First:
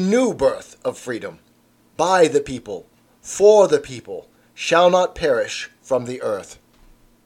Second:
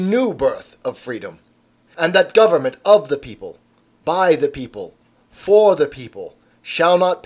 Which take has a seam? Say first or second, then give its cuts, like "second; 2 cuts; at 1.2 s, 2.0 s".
first; 1 cut; at 1.8 s